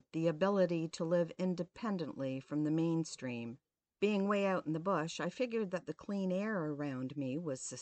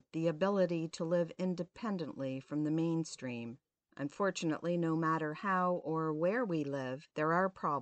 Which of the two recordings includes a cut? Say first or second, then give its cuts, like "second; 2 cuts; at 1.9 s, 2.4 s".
first; 1 cut; at 3.9 s